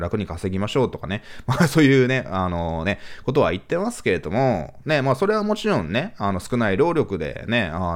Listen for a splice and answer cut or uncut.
uncut